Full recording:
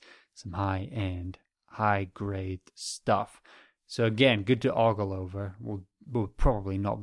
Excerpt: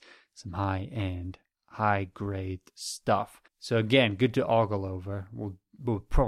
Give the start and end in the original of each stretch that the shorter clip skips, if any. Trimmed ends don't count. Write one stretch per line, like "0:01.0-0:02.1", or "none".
0:03.5-0:03.7